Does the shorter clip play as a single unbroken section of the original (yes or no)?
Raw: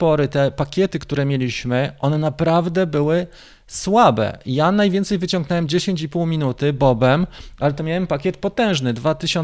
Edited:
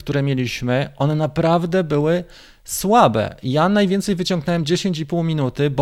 yes